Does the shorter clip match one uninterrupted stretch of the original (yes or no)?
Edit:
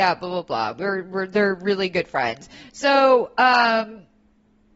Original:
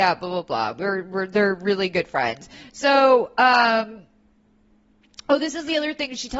yes